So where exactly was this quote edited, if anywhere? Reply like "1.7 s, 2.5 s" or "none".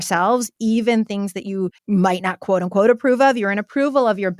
1.8 s